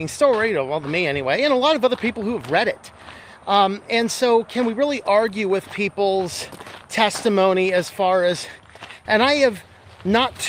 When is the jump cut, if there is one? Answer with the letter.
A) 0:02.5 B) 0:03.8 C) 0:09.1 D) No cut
C